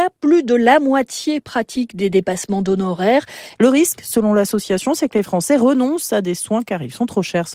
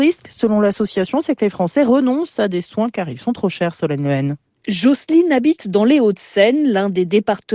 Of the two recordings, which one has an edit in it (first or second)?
first